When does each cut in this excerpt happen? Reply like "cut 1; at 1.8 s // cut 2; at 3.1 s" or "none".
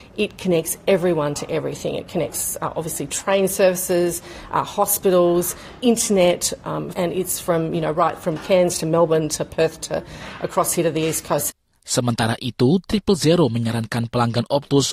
cut 1; at 6.9 s